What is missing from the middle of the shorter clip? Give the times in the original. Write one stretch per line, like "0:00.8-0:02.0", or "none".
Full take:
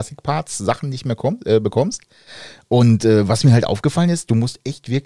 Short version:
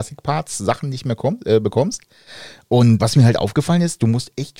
0:03.0-0:03.3